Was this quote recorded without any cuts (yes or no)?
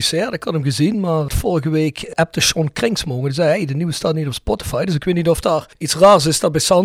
yes